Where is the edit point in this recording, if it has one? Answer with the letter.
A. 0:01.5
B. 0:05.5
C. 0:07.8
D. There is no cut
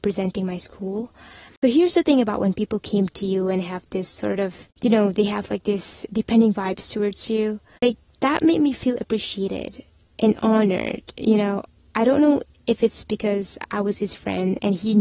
A